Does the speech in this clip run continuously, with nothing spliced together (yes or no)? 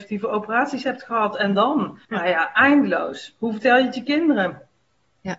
no